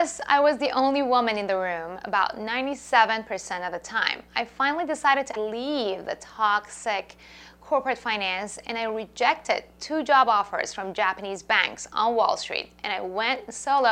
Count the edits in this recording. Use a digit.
1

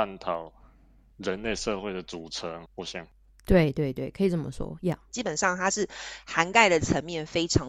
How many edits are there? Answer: 1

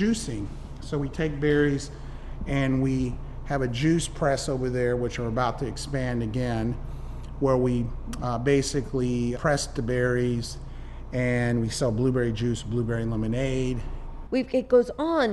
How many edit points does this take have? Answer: 2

